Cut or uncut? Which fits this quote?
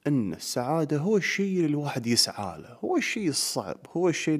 uncut